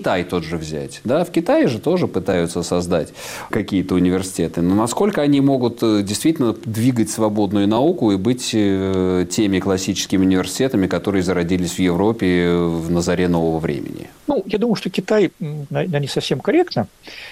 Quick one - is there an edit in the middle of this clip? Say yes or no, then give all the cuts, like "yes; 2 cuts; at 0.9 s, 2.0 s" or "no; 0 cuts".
yes; 2 cuts; at 14.2 s, 15.7 s